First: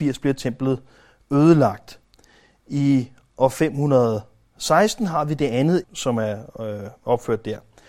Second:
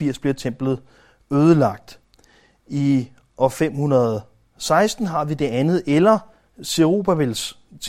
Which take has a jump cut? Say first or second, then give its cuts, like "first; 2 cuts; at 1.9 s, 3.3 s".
first; 1 cut; at 5.8 s